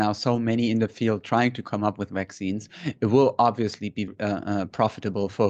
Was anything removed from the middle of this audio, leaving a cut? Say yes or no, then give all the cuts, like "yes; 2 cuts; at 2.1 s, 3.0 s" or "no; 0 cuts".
yes; 1 cut; at 4.1 s